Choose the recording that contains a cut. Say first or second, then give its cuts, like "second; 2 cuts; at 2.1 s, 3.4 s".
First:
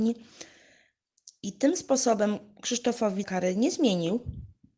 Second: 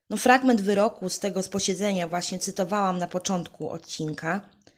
first; 1 cut; at 3.2 s